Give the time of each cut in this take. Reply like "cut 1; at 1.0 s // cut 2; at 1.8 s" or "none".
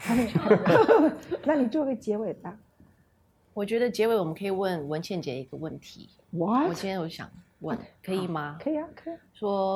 none